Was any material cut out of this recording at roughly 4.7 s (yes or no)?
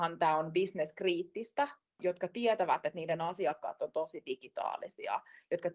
no